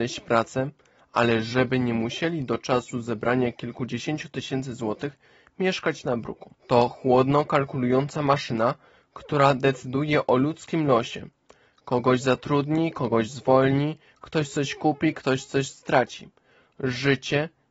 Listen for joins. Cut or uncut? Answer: cut